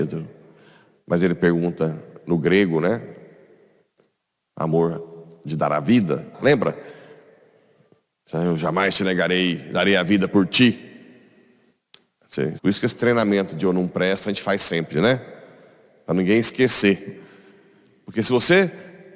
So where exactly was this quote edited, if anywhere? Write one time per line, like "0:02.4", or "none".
0:06.3
0:12.6